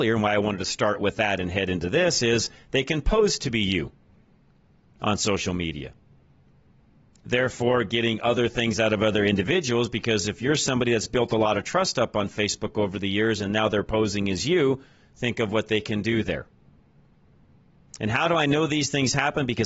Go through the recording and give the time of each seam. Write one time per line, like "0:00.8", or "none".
none